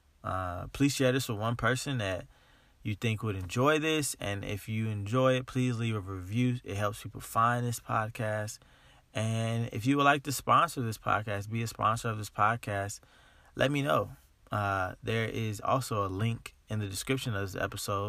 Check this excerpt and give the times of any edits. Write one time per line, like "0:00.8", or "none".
none